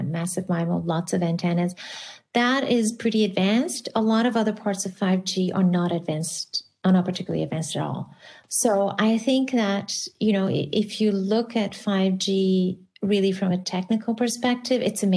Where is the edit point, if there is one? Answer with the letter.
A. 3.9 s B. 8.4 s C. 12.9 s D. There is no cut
B